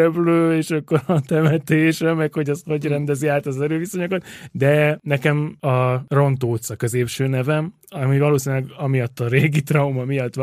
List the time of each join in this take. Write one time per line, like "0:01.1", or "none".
0:04.5